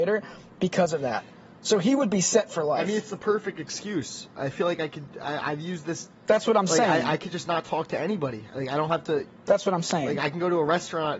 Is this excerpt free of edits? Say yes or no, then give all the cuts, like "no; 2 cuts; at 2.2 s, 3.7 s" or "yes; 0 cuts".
yes; 0 cuts